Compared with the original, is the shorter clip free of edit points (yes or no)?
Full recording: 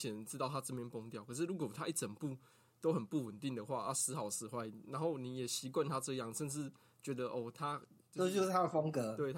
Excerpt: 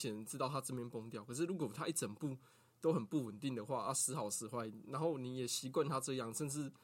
yes